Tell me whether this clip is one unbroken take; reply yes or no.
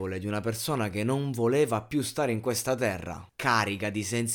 no